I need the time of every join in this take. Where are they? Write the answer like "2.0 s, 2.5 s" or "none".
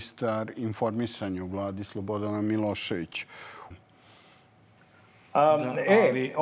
3.7 s